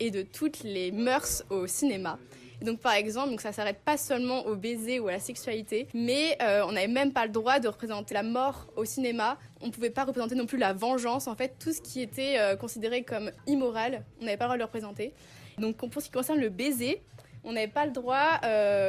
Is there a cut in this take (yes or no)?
yes